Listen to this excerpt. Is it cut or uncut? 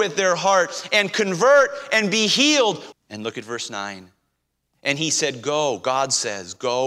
cut